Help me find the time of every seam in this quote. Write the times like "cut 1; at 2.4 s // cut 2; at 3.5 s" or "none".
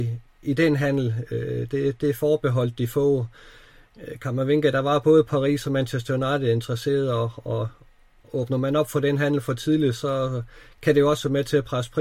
none